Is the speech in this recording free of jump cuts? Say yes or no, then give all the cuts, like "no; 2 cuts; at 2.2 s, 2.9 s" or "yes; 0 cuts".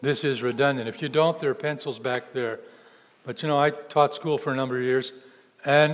yes; 0 cuts